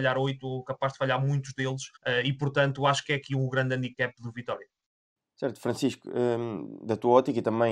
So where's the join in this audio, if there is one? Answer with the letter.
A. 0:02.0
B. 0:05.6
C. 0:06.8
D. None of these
A